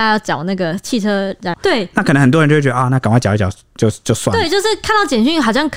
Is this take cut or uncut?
cut